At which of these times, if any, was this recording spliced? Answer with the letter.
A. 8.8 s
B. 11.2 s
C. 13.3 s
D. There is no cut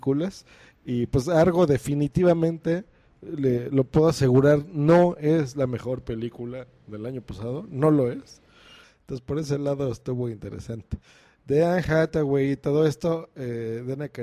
A